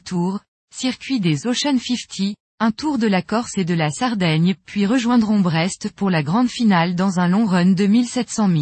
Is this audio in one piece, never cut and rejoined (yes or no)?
no